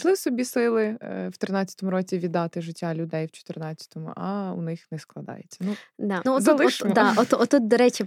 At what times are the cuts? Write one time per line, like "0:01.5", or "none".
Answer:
0:06.3